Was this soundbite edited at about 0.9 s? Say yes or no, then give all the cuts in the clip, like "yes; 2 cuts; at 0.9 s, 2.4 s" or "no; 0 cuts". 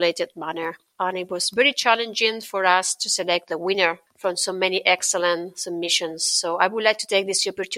yes; 1 cut; at 0.9 s